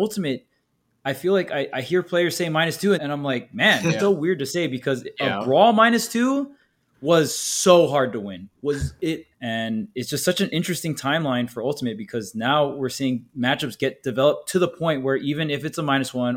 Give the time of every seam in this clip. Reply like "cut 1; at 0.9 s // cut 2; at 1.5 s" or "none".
cut 1; at 3.0 s // cut 2; at 4.0 s // cut 3; at 9.3 s